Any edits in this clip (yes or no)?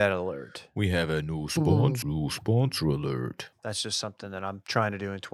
yes